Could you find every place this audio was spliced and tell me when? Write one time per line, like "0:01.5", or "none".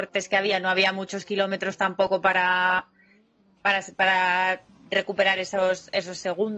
none